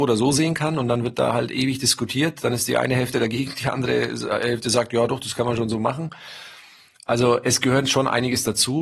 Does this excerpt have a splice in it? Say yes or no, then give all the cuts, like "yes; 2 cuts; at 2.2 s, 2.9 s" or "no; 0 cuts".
no; 0 cuts